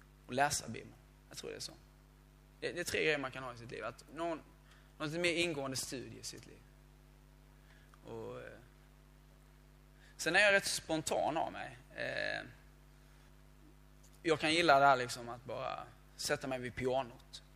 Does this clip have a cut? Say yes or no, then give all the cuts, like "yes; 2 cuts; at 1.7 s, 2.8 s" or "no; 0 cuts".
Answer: no; 0 cuts